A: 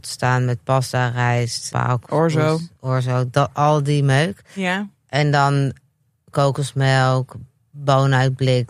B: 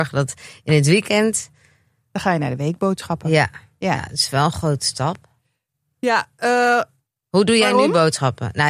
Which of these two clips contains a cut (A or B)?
A